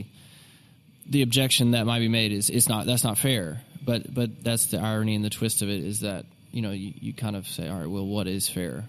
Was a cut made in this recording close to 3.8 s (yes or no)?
no